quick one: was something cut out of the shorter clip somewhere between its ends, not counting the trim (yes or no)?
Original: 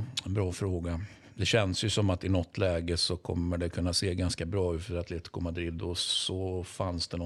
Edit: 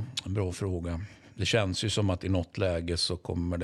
no